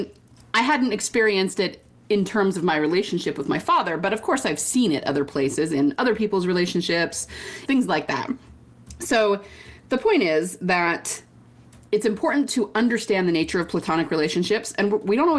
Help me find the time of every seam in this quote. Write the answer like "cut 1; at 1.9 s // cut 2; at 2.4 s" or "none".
cut 1; at 7.7 s